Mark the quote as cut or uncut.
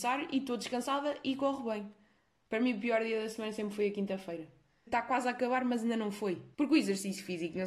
cut